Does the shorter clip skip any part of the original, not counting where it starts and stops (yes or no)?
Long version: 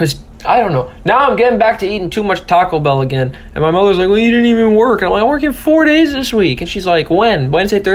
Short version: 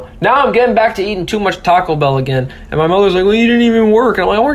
no